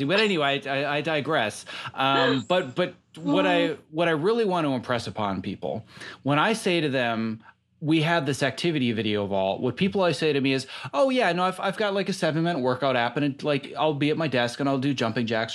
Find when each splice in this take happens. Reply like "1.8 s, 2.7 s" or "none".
none